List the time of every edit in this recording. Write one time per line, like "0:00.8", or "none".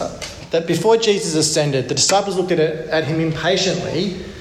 none